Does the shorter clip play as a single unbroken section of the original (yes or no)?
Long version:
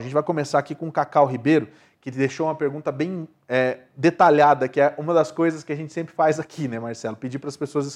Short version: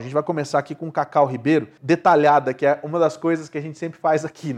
no